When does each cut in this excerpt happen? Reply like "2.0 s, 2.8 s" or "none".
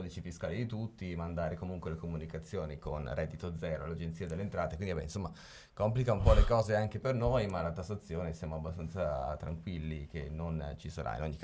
none